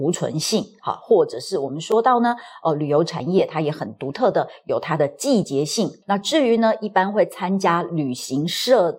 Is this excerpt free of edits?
no; 1 cut; at 6.0 s

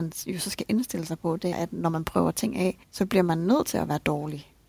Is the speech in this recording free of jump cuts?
no; 2 cuts; at 1.5 s, 2.8 s

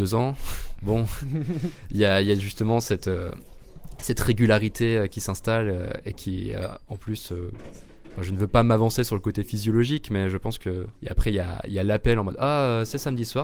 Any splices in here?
yes; 1 cut; at 11.0 s

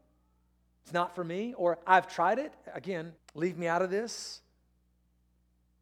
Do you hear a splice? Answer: yes; 1 cut; at 3.2 s

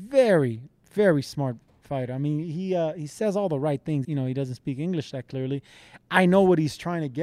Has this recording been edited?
yes; 1 cut; at 4.0 s

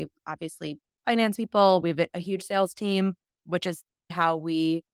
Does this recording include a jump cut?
no; 0 cuts

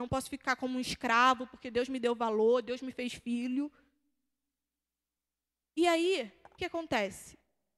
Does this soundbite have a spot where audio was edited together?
yes; 1 cut; at 6.6 s

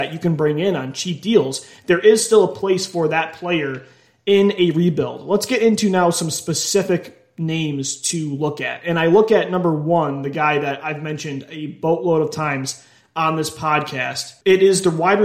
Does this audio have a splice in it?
no; 0 cuts

